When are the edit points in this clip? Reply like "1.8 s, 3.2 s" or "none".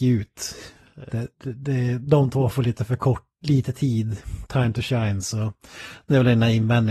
1.1 s